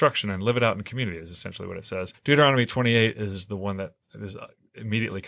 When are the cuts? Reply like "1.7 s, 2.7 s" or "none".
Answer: 2.1 s

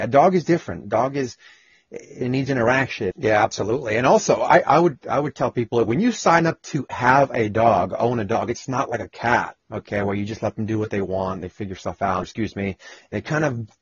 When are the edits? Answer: 3.1 s, 9.6 s, 12.2 s

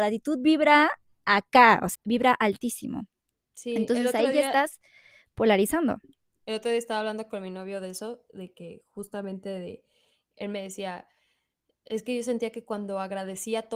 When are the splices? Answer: 1.9 s

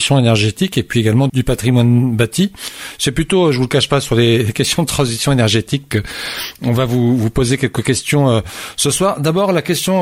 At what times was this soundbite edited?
1.3 s

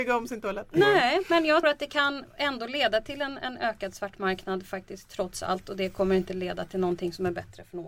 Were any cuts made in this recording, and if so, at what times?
1.6 s

